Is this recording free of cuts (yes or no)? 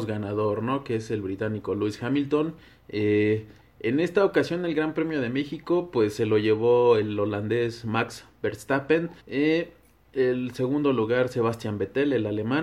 no